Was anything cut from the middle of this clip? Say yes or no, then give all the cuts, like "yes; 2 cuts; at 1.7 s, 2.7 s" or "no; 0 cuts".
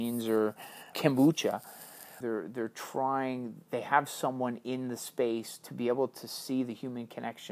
yes; 2 cuts; at 0.9 s, 2.2 s